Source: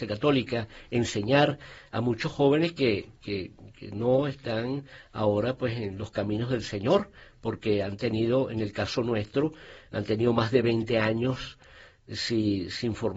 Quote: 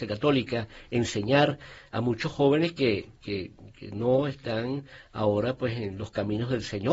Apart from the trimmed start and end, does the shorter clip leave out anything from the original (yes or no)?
no